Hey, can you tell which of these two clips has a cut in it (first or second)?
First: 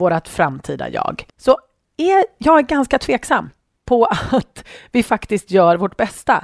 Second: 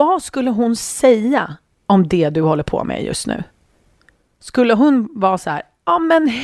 first